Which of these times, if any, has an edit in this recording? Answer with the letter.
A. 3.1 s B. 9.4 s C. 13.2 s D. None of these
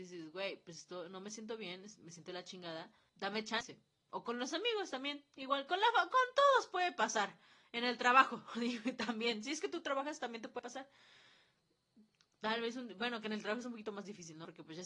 A